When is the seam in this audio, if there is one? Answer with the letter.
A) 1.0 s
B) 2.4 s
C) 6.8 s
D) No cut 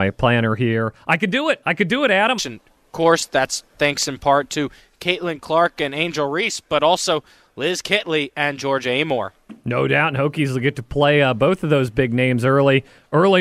B